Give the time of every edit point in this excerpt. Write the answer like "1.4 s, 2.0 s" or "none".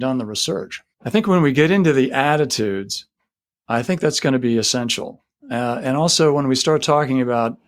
0.9 s

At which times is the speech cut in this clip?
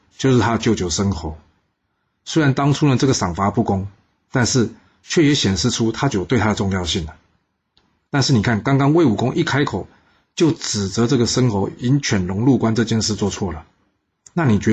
6.1 s

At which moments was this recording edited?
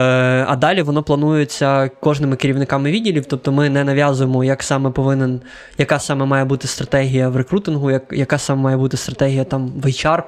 none

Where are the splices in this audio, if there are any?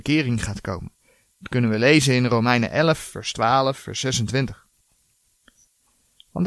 3.0 s

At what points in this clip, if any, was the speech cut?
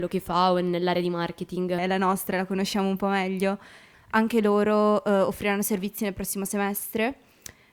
1.8 s, 3.9 s

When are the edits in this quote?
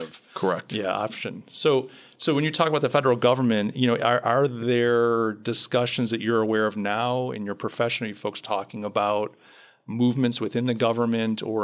none

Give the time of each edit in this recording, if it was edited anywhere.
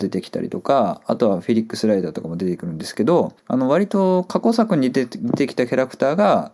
3.4 s

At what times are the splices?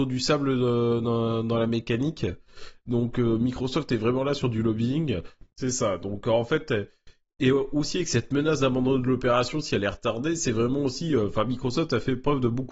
5.5 s

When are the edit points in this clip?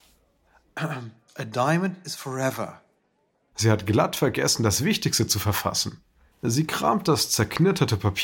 3.5 s, 6.3 s

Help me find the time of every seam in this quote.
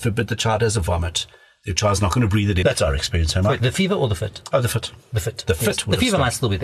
2.6 s

